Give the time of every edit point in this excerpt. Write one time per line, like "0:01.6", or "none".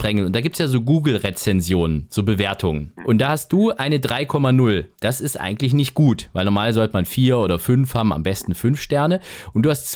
0:03.0